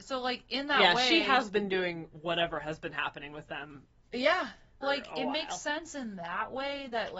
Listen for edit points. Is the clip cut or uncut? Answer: cut